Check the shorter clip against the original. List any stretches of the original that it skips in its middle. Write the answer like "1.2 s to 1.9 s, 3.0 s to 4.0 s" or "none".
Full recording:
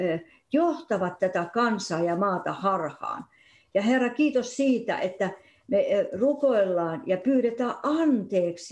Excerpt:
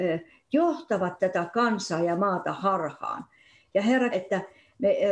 4.1 s to 5.0 s